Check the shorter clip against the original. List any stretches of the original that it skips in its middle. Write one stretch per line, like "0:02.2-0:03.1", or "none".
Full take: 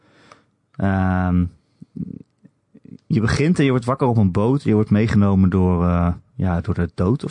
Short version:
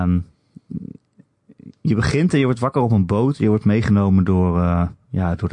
none